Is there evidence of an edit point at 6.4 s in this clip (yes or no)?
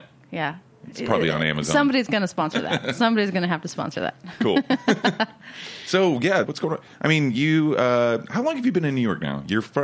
yes